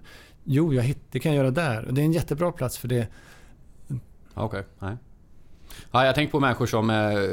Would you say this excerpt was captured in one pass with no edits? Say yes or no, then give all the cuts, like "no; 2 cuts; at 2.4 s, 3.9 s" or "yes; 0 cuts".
no; 1 cut; at 4.3 s